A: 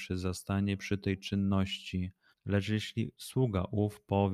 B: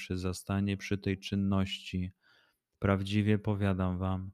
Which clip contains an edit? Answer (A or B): A